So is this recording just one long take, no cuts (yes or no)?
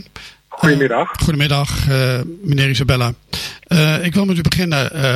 yes